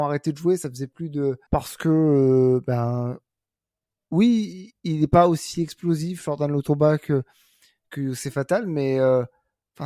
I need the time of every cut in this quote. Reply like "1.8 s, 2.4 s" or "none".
1.5 s

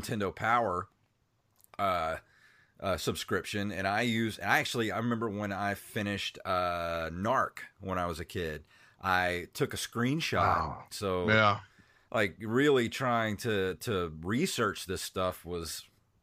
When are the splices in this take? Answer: 10.9 s

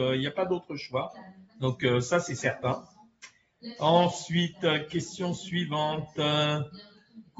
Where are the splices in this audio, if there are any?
none

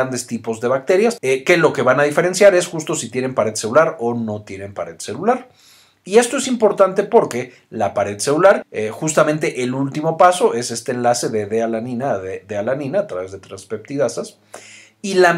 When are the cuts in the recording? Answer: 1.2 s, 8.6 s

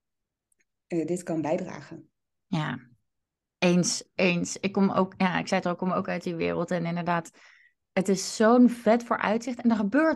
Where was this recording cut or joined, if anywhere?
none

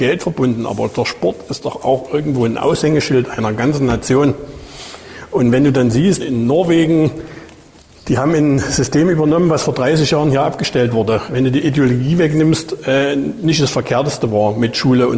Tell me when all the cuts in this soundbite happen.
6.2 s, 11.3 s

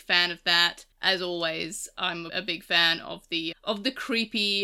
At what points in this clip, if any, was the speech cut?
2.3 s, 3.5 s

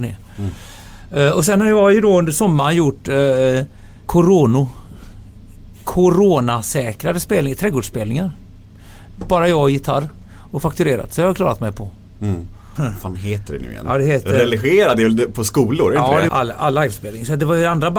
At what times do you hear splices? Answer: 4.1 s, 12.8 s, 16.3 s

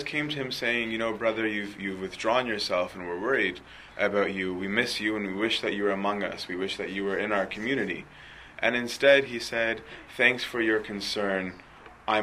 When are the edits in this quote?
none

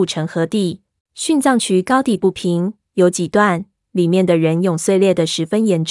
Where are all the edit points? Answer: 1.0 s

